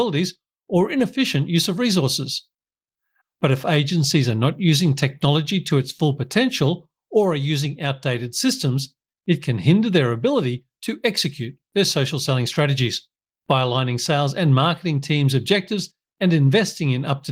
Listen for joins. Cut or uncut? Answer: cut